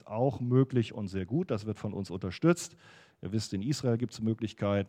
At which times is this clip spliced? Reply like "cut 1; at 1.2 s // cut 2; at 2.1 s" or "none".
none